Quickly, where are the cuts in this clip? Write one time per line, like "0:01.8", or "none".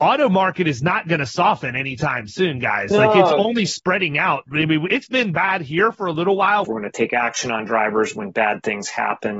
0:06.6